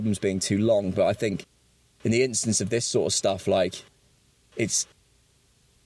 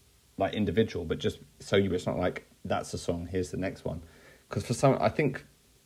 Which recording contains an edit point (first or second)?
second